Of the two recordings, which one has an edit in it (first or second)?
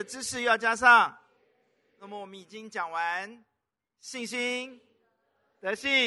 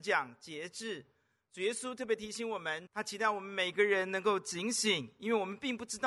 second